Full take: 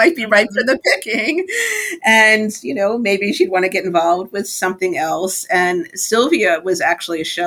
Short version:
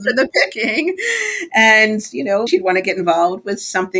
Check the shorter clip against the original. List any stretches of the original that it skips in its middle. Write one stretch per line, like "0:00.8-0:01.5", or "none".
0:03.0-0:03.3